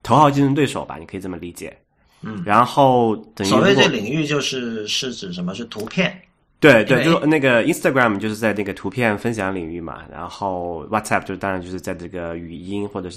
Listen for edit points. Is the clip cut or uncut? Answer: uncut